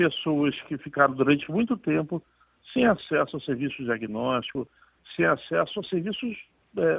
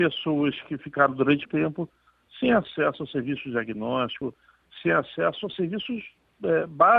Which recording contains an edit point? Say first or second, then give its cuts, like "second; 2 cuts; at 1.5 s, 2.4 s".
second; 1 cut; at 1.4 s